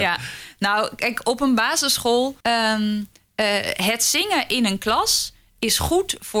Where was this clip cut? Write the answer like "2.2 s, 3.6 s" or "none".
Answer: 2.4 s